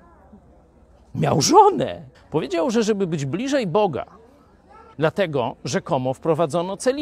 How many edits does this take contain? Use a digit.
2